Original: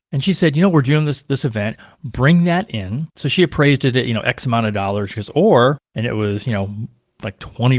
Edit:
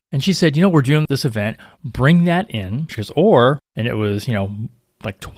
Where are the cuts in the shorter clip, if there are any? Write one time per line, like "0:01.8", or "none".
0:01.1
0:02.9